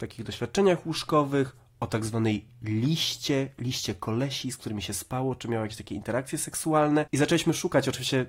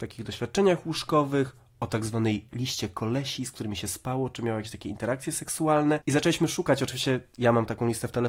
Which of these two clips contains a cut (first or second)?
second